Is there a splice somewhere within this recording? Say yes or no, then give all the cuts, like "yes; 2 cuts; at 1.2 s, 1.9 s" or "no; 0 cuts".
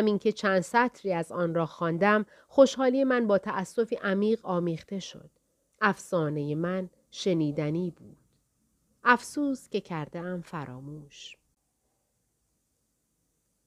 yes; 1 cut; at 5.7 s